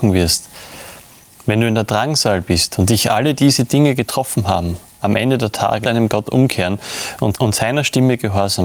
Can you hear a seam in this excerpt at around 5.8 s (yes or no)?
yes